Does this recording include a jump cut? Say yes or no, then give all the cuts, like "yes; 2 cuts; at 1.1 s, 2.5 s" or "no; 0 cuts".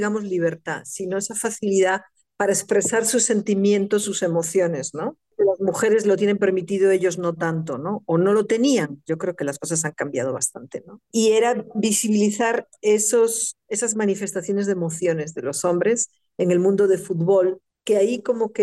no; 0 cuts